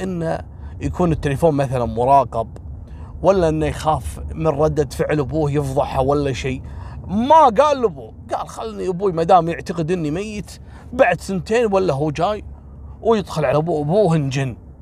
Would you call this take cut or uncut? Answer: uncut